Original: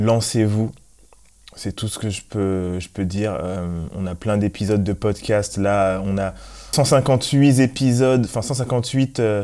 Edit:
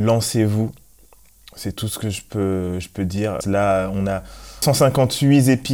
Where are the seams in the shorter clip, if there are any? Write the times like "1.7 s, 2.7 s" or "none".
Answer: 3.4 s

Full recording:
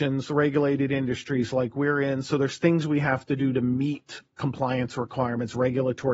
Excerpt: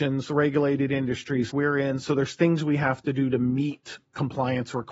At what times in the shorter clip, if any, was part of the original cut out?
1.5 s

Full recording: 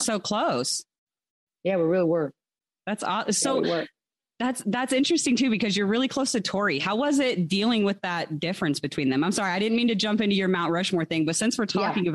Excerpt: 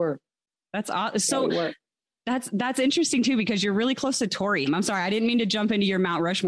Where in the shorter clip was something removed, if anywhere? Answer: 4.7 s

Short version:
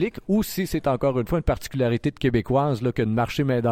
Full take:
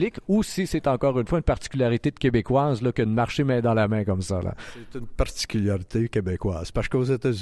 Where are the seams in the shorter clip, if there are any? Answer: none

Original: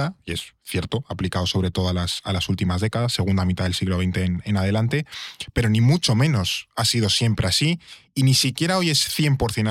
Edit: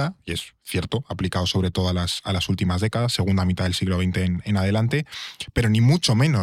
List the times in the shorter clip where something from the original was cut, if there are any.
none

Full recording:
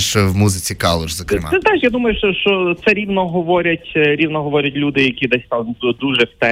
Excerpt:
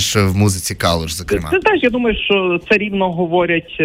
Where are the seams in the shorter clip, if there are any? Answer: 2.2 s

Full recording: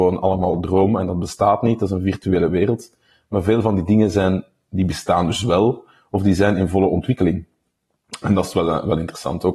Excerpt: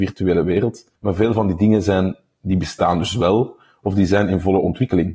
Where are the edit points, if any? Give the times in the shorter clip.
1.0 s

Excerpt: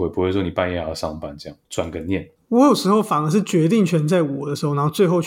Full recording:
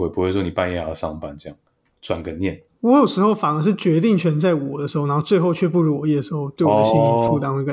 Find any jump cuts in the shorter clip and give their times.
1.6 s

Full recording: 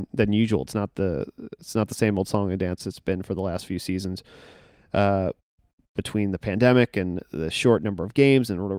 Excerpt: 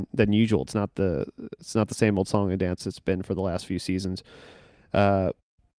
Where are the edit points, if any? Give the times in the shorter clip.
none

